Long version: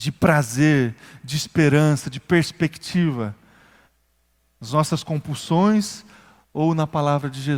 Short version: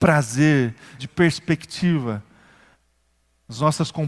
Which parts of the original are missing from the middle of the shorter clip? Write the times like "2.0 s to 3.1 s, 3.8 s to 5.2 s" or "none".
1.2 s to 2.1 s